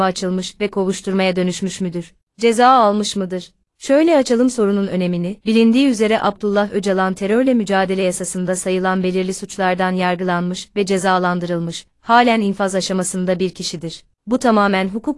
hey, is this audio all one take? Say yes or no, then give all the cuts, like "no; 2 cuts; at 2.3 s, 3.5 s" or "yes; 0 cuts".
no; 2 cuts; at 5.4 s, 14.2 s